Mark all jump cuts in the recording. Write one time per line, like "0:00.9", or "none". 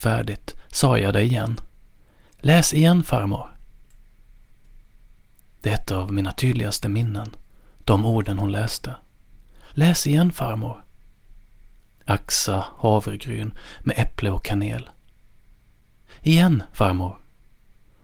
0:09.7